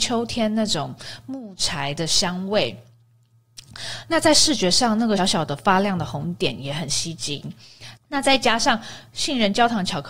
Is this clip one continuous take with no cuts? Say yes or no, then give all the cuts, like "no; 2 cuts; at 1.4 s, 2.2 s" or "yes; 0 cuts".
no; 2 cuts; at 5.2 s, 8.0 s